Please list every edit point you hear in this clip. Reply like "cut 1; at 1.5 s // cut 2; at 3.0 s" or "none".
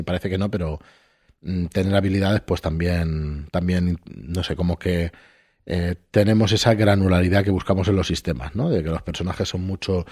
none